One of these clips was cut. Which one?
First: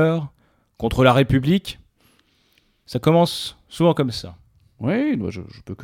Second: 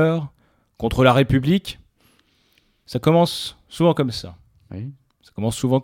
second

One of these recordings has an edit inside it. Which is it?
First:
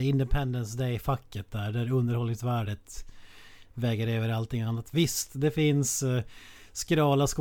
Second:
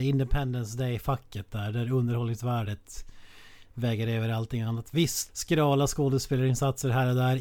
second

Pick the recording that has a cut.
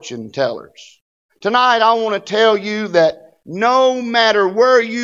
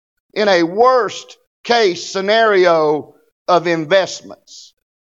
first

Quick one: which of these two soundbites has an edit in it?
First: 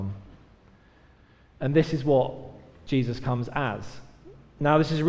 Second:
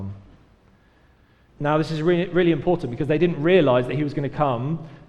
second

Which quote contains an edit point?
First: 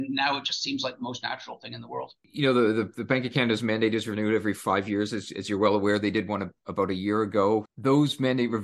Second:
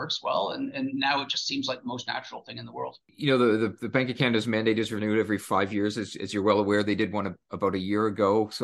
first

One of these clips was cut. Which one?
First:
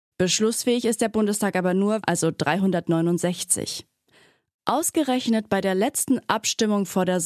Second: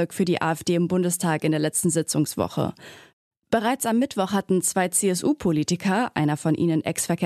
first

